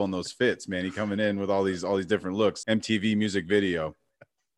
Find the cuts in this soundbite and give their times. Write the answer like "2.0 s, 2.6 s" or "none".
2.6 s

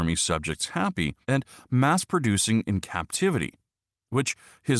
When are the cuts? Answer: 1.2 s

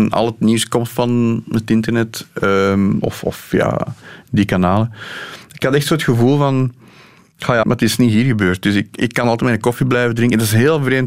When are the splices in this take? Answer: 7.6 s

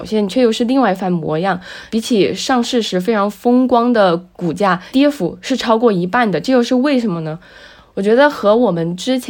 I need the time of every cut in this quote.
none

